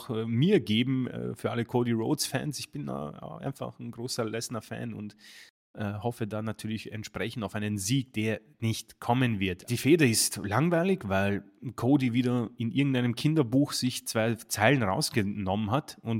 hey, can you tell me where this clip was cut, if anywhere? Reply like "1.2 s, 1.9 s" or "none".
9.7 s